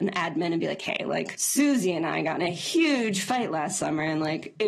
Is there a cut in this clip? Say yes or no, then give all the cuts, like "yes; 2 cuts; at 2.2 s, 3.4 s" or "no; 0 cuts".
no; 0 cuts